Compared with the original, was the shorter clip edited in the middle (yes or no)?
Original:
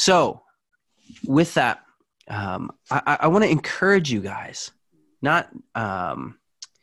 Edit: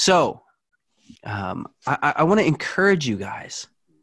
yes